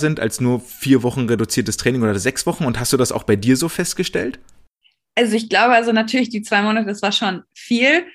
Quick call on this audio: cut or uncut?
uncut